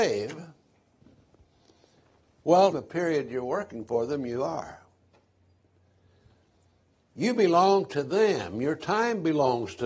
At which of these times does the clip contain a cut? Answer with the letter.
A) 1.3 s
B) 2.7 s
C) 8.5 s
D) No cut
B